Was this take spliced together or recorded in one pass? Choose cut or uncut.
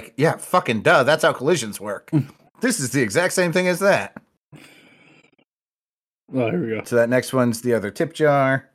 uncut